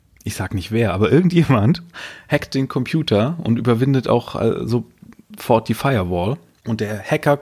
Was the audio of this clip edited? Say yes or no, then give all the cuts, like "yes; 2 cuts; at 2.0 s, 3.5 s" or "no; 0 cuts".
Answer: no; 0 cuts